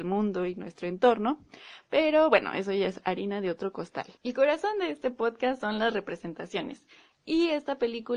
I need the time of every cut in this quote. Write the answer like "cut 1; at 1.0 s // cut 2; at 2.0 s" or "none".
cut 1; at 4.2 s